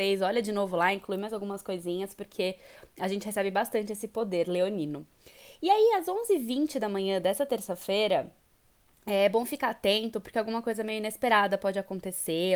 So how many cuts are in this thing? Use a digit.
0